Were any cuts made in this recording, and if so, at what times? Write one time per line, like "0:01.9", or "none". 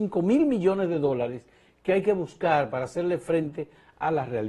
none